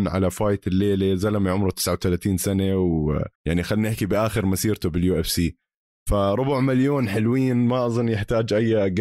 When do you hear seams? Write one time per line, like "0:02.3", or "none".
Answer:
0:03.4